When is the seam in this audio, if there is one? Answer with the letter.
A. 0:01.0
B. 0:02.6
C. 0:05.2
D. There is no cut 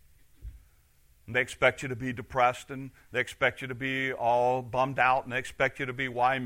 D